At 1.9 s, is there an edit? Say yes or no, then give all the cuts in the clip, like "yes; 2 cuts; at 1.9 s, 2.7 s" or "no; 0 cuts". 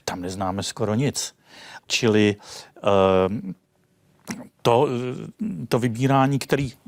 yes; 1 cut; at 1.9 s